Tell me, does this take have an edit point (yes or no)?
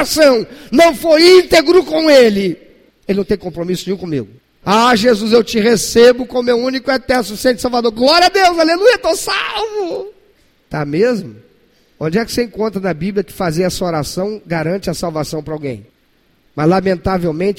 yes